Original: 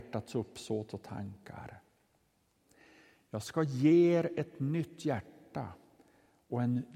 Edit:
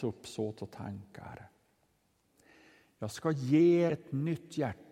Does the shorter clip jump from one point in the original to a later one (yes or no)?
yes